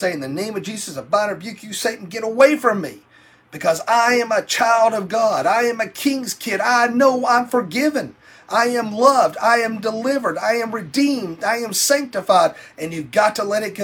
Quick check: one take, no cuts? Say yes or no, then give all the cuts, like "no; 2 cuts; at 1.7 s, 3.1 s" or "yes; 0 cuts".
yes; 0 cuts